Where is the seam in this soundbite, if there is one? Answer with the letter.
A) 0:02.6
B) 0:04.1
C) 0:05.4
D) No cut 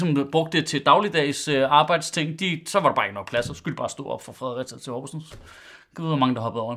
D